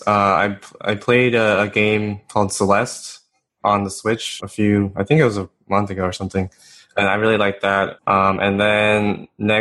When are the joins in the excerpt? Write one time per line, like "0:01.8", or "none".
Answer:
0:04.4
0:08.0